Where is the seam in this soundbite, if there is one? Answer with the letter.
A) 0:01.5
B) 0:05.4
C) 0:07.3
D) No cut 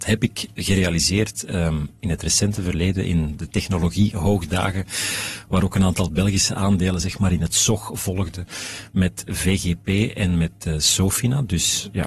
D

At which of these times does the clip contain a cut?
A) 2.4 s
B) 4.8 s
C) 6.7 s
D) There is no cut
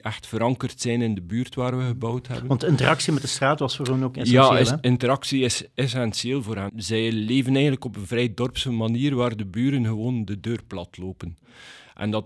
C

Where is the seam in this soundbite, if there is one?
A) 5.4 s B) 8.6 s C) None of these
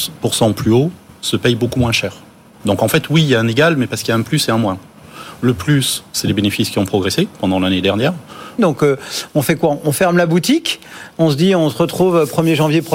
B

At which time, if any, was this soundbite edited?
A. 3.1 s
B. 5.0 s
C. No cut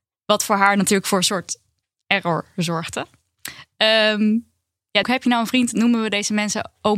B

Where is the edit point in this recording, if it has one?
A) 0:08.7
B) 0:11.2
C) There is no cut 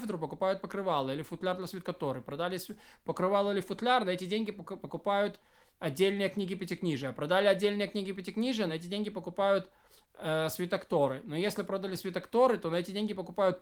C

